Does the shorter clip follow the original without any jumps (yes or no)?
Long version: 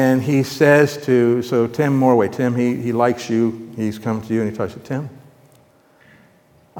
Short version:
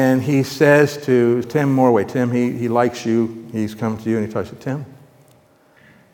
no